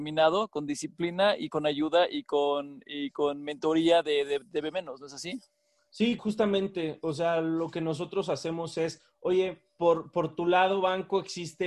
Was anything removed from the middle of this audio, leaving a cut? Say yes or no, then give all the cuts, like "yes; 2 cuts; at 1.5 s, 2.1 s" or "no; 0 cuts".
yes; 1 cut; at 6.2 s